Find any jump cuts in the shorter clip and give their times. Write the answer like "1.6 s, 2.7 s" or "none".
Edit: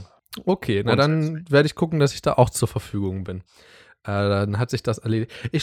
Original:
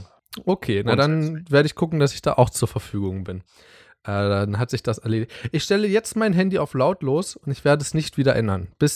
none